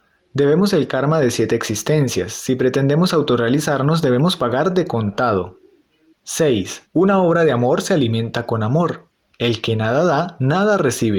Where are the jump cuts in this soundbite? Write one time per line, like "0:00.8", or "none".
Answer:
0:06.9
0:09.3